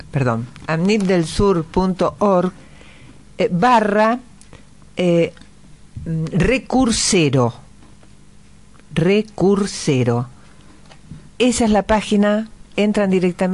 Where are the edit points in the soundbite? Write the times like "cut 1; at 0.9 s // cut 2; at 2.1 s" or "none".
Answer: cut 1; at 11.3 s